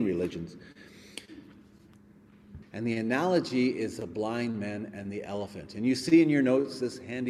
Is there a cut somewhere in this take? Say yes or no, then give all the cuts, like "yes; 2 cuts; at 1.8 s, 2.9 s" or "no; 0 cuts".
yes; 1 cut; at 2.6 s